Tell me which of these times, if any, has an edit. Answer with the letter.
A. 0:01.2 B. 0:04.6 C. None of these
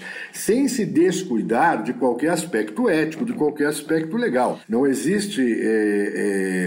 B